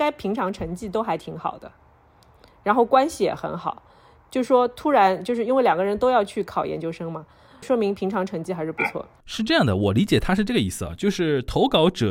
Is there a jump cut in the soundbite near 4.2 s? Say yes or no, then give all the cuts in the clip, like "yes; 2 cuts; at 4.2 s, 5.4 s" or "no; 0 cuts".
no; 1 cut; at 7.6 s